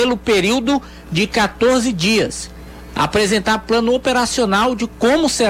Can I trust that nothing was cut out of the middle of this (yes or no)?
no